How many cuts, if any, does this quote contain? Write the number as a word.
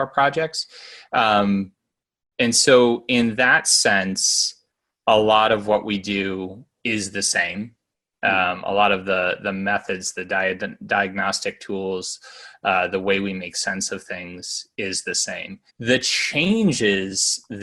one